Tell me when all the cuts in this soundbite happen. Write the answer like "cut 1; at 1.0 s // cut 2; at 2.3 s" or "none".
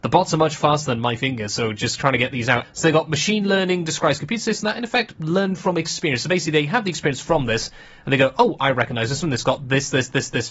cut 1; at 2.6 s